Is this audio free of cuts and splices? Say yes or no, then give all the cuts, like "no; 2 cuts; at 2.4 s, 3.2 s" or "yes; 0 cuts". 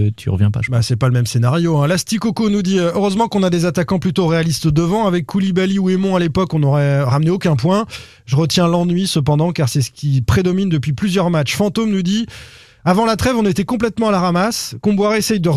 yes; 0 cuts